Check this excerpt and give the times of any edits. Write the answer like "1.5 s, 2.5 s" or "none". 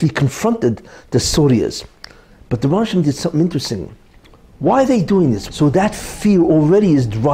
5.5 s